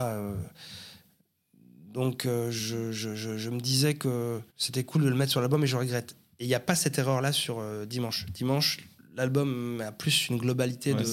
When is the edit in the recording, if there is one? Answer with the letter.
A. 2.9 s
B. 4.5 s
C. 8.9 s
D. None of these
B